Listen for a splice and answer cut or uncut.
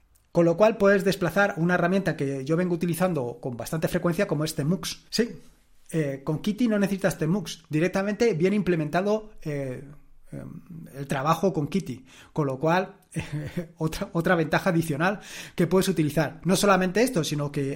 cut